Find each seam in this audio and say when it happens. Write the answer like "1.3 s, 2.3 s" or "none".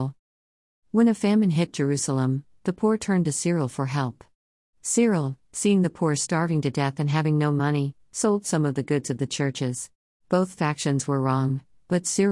10.1 s